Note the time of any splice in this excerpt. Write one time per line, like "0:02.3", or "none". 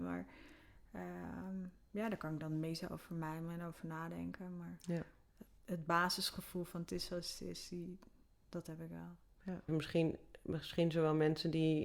0:09.7